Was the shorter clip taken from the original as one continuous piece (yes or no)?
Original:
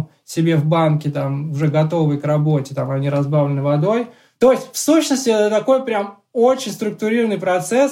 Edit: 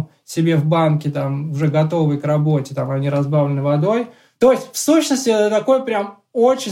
yes